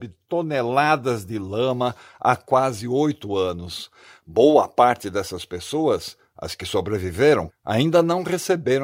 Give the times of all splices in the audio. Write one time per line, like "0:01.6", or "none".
0:07.5